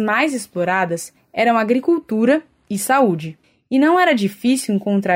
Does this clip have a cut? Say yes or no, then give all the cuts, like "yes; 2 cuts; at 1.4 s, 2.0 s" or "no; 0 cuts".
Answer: no; 0 cuts